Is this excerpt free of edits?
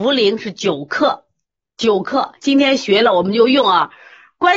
yes; 0 cuts

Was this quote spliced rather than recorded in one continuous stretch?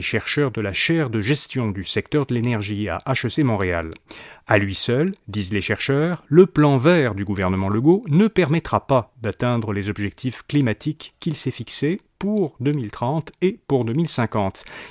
no; 0 cuts

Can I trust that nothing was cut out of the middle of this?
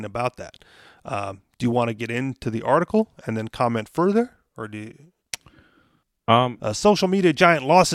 no; 1 cut; at 6.6 s

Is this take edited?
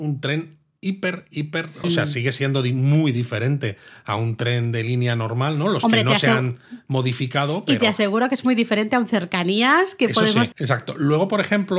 yes; 2 cuts; at 1.8 s, 10.5 s

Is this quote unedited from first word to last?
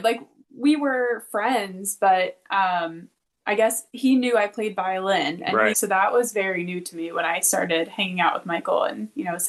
no; 1 cut; at 5.7 s

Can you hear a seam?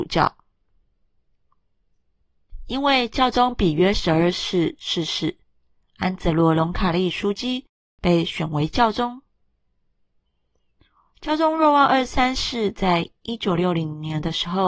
yes; 1 cut; at 5.8 s

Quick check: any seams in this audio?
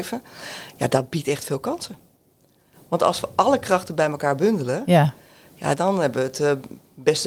no; 0 cuts

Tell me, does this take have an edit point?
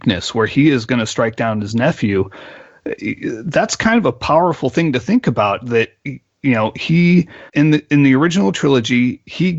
yes; 1 cut; at 7.5 s

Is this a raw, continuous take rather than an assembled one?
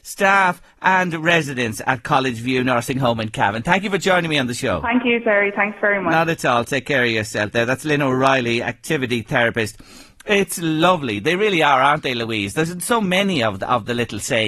yes; 0 cuts

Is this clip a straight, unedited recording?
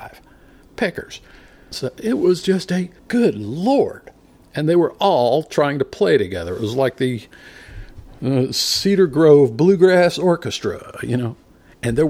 no; 2 cuts; at 1.7 s, 3.0 s

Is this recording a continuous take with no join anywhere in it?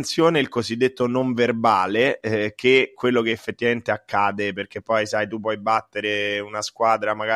yes; 0 cuts

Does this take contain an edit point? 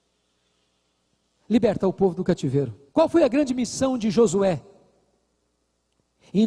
yes; 1 cut; at 2.9 s

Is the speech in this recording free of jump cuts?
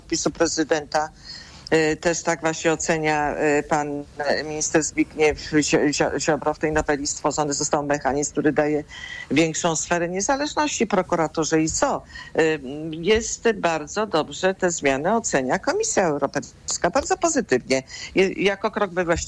yes; 0 cuts

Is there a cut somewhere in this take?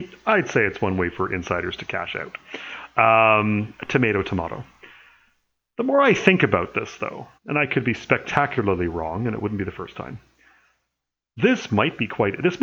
yes; 1 cut; at 7.4 s

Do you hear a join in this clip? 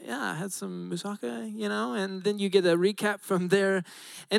yes; 1 cut; at 2.2 s

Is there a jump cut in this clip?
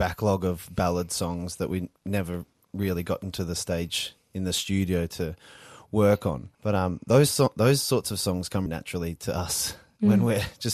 yes; 2 cuts; at 6.5 s, 8.7 s

